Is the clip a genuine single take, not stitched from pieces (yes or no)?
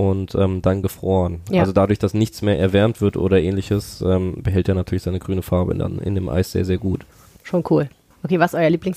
yes